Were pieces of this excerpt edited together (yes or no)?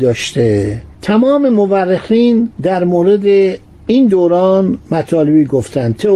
yes